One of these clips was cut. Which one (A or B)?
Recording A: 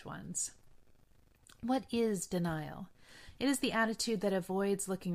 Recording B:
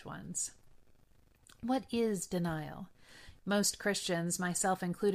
B